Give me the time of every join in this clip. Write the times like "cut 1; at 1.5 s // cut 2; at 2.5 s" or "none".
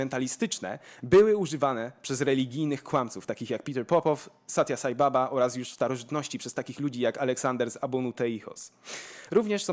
none